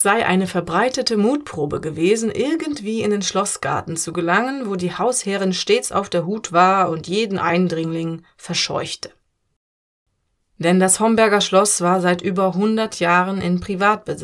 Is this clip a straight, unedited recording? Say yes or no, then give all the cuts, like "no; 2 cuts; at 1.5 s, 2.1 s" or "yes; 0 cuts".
yes; 0 cuts